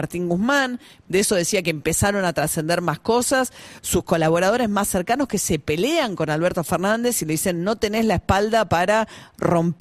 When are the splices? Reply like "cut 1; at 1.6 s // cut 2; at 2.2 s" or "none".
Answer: cut 1; at 1.0 s // cut 2; at 3.8 s